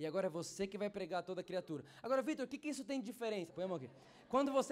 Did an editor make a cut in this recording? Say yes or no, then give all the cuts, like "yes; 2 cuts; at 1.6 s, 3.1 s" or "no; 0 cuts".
yes; 1 cut; at 3.5 s